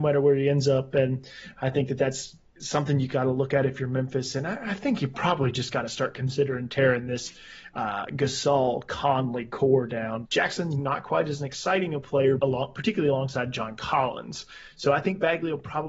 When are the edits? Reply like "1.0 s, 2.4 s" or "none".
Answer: 10.3 s, 12.4 s